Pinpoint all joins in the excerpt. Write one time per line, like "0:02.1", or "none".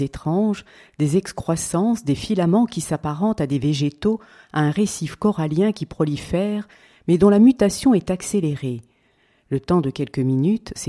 none

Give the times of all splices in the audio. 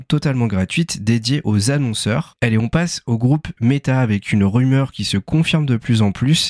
0:02.4

